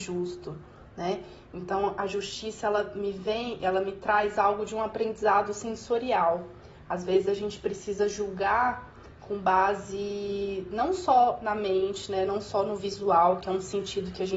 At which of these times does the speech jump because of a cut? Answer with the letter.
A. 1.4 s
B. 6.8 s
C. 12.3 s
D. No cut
D